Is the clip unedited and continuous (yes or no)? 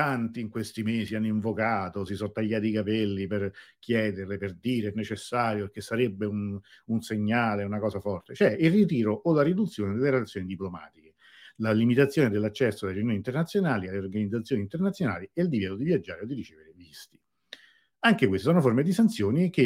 yes